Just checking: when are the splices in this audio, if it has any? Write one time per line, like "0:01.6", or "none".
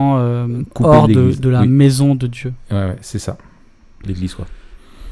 0:04.0